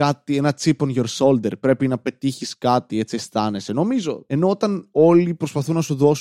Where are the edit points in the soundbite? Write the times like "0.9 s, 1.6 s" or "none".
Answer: none